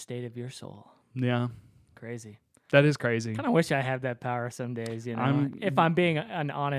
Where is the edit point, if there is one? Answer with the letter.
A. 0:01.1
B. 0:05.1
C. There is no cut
C